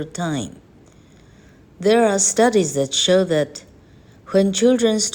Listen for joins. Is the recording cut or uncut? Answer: uncut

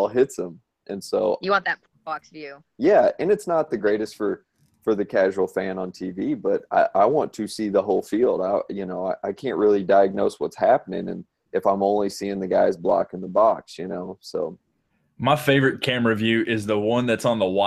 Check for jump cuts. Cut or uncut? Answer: uncut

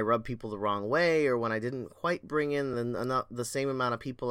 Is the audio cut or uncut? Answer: uncut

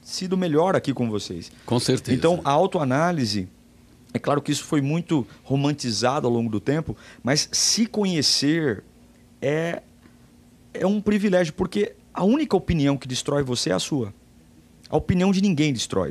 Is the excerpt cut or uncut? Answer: cut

